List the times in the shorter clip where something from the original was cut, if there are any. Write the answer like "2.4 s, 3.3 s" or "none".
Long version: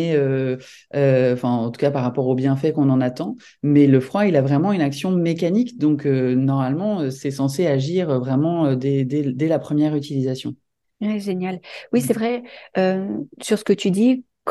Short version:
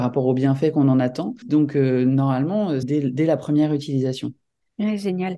1.4 s, 2.8 s